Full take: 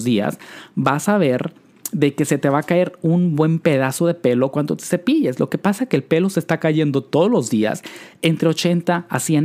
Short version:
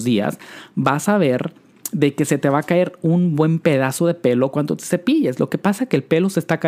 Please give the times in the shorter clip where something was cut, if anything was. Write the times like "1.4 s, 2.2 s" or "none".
none